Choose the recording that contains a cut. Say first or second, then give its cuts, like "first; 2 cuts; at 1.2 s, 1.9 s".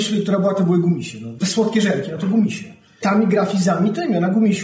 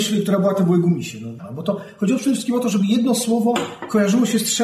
second; 1 cut; at 1.4 s